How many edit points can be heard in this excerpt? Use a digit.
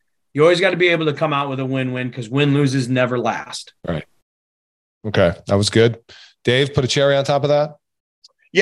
1